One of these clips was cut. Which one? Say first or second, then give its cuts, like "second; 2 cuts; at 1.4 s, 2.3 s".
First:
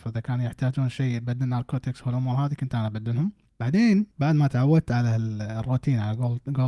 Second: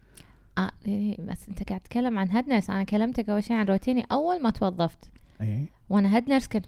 first; 1 cut; at 4.1 s